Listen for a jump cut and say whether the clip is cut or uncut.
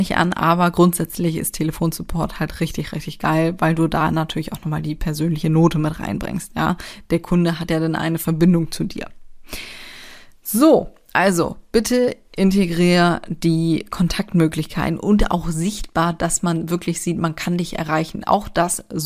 uncut